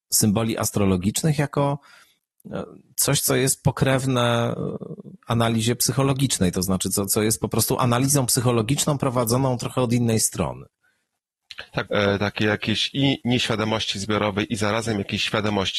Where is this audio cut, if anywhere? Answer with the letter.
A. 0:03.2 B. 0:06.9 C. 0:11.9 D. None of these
C